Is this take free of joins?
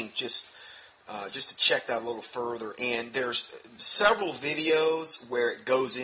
yes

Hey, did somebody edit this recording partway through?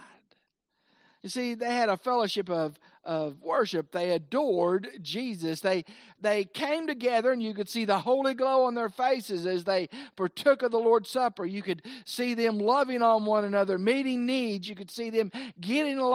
no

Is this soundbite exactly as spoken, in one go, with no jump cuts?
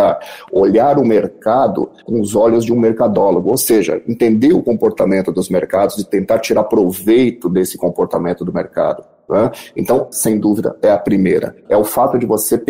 no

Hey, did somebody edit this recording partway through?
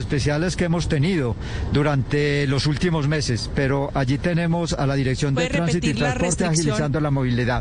no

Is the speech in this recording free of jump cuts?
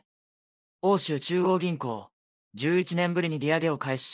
no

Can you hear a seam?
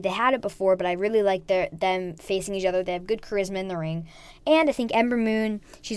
no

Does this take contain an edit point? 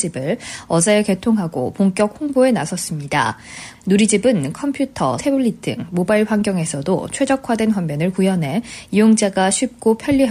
yes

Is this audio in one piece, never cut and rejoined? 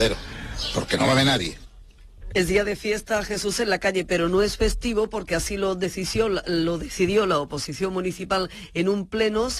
no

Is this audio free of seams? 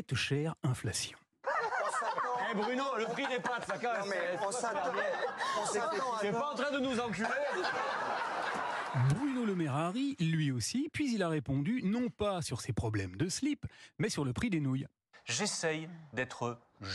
yes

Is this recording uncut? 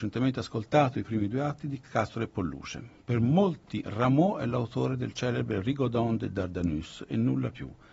yes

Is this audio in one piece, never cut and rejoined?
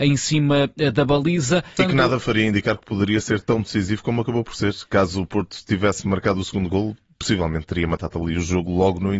no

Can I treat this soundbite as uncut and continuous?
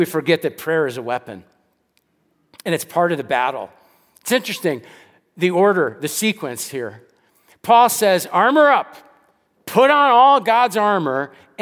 yes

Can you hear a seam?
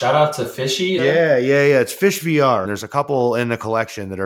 yes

